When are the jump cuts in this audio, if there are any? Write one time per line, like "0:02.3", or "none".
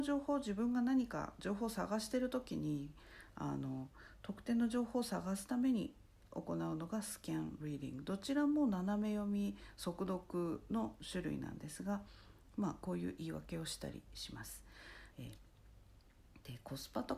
0:15.1